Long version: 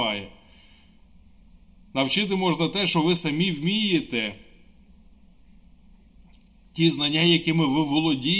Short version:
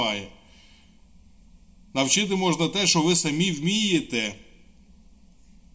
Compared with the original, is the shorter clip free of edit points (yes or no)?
yes